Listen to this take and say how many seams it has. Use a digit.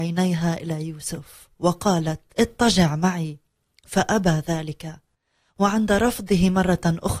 1